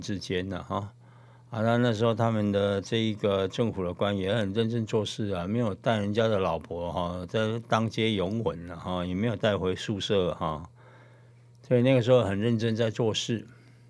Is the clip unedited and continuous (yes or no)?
yes